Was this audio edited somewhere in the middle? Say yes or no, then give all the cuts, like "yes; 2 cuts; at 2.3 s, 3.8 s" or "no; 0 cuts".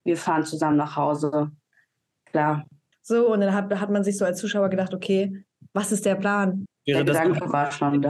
yes; 2 cuts; at 2.9 s, 6.7 s